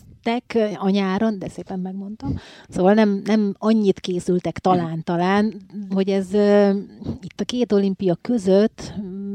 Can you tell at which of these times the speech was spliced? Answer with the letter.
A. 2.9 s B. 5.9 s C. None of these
B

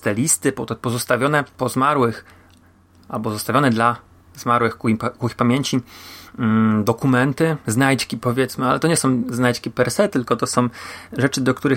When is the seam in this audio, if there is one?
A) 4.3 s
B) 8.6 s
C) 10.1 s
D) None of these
D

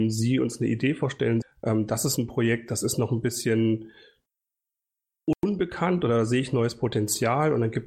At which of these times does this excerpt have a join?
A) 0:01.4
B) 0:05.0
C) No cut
A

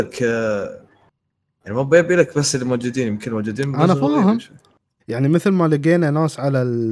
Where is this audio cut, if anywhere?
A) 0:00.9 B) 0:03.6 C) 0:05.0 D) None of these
C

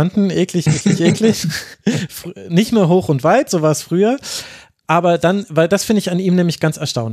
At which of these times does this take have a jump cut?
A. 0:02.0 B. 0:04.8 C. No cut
C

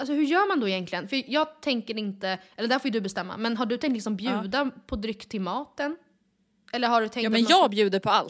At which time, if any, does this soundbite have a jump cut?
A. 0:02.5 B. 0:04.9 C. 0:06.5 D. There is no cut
D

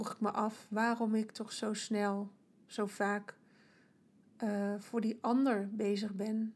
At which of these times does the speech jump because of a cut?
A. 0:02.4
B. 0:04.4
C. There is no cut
C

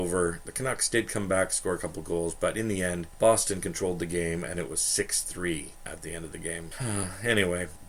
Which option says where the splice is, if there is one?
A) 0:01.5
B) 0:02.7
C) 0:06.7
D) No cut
C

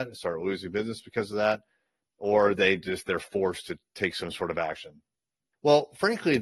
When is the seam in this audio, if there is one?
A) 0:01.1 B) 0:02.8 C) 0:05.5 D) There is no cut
C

